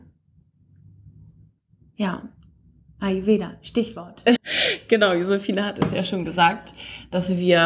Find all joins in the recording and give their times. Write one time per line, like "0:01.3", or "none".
0:04.4